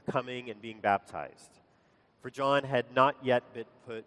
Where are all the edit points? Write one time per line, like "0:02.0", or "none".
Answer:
none

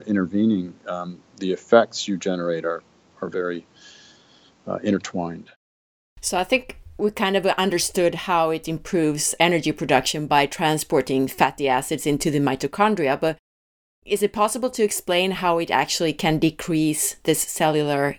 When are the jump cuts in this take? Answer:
none

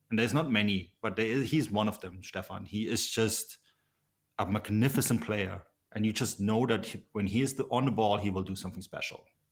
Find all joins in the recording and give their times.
0:05.9

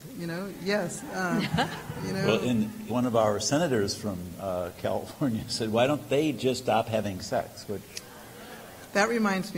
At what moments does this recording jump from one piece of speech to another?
0:02.9

